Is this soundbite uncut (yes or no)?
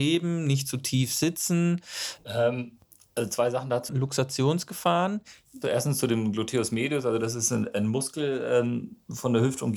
no